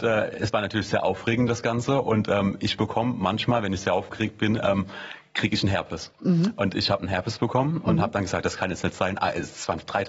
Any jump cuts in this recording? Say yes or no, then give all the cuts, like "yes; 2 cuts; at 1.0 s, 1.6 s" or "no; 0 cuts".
no; 0 cuts